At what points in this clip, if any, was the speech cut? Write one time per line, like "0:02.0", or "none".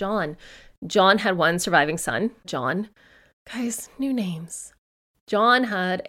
0:02.4